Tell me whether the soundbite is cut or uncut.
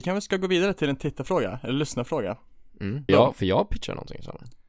cut